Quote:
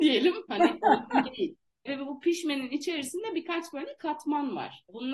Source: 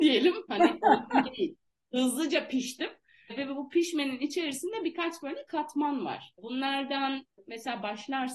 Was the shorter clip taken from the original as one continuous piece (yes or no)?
no